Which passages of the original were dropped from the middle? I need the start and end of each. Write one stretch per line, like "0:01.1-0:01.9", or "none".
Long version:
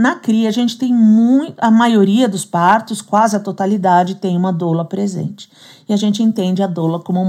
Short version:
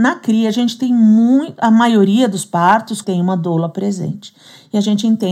0:03.0-0:04.2